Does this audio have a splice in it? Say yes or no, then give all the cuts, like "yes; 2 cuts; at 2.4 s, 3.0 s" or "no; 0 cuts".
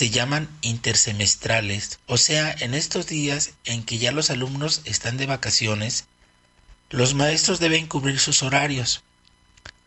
yes; 1 cut; at 2.0 s